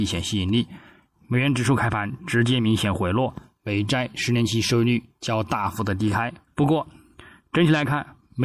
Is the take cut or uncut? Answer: cut